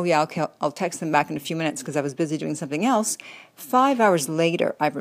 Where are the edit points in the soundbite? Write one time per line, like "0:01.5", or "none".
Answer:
none